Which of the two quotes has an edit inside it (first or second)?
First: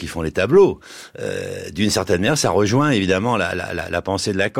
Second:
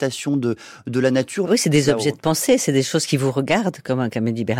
second